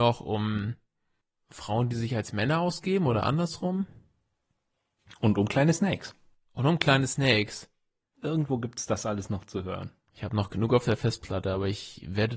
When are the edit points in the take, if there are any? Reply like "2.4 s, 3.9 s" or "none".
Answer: 8.1 s